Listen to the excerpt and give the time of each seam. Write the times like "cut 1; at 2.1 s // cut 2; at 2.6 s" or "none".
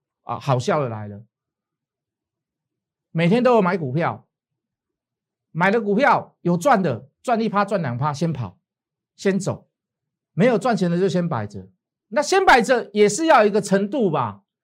cut 1; at 10.2 s